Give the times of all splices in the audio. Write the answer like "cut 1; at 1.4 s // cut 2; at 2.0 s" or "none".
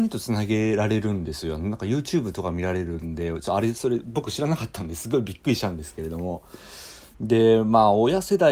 cut 1; at 7.1 s